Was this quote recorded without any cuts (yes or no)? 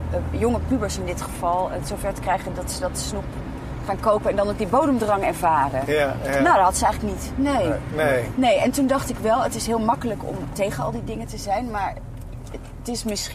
yes